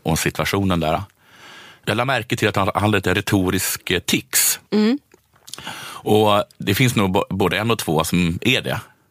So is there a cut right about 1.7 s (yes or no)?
no